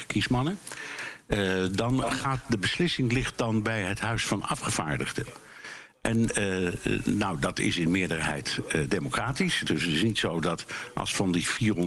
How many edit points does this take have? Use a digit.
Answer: 1